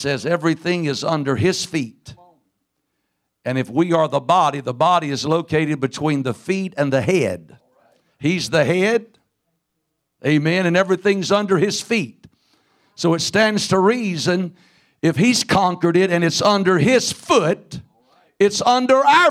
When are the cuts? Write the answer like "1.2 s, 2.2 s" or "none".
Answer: none

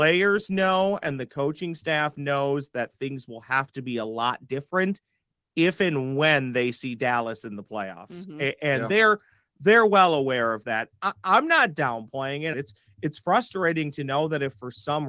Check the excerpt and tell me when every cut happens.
12.5 s

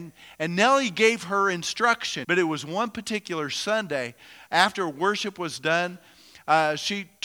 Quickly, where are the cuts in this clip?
2.2 s

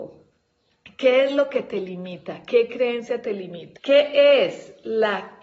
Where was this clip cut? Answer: 3.8 s

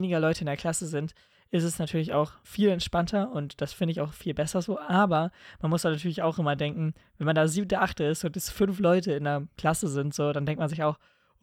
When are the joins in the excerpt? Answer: none

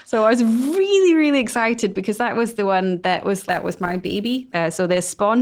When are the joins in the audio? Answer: 3.5 s, 4.5 s

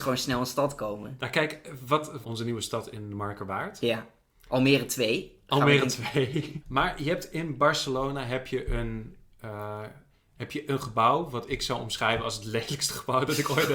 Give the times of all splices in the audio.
2.2 s, 6.6 s

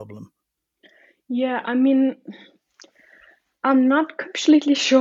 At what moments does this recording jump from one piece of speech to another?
none

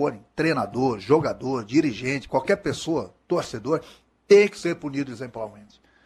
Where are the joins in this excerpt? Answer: 2.3 s

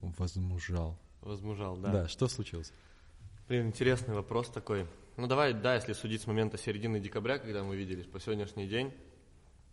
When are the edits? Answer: none

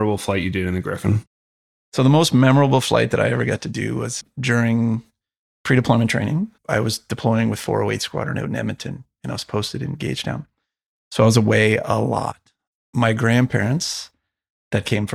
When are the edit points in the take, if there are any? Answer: none

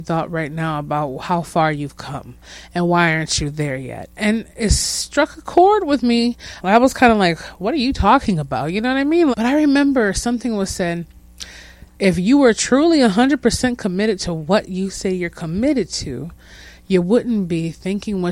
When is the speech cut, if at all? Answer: 6.6 s, 9.3 s, 11.9 s

